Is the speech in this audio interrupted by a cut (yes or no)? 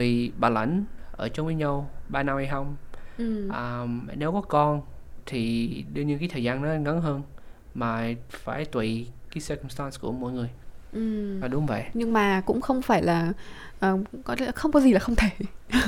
yes